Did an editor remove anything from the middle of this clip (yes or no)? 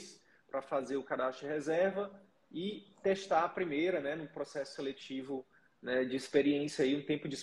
no